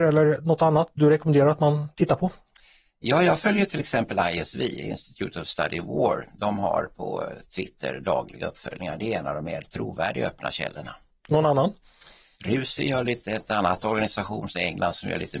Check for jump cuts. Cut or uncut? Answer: cut